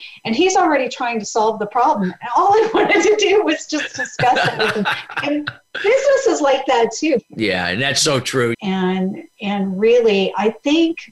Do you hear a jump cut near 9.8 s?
no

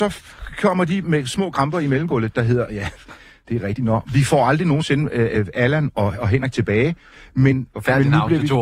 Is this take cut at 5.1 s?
no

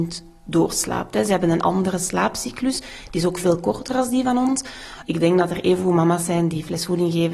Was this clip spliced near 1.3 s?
no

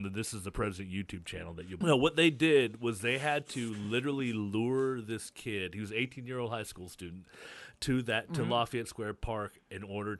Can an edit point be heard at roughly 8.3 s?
no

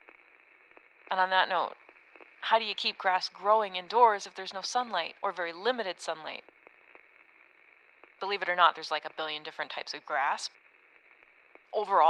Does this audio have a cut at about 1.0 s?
no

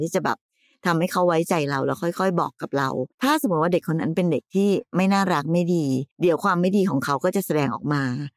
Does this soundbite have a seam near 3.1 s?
yes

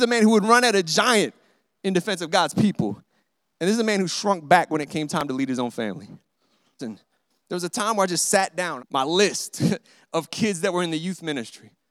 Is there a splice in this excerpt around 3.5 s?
no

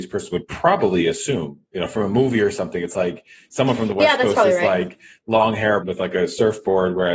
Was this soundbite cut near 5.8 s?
yes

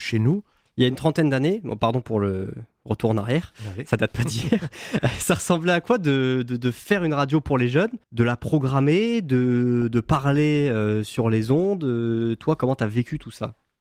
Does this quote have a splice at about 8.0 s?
yes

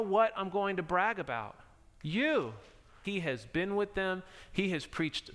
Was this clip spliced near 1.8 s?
no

